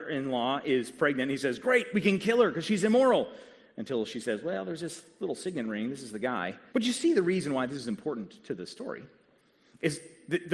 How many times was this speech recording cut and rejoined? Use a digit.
1